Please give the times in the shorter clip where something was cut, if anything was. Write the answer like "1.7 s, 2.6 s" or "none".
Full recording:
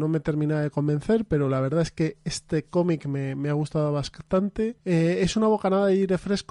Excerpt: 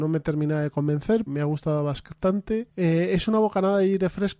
1.3 s